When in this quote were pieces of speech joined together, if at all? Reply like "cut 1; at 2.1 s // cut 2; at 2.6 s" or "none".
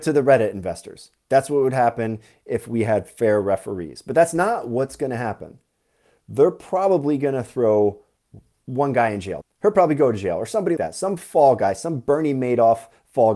cut 1; at 9.4 s // cut 2; at 10.8 s